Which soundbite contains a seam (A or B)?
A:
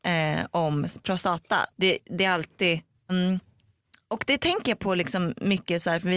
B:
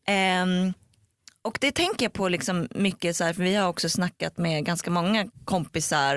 A